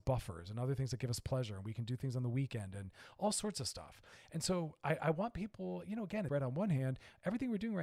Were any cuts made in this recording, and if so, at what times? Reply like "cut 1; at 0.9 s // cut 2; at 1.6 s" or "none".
cut 1; at 6.3 s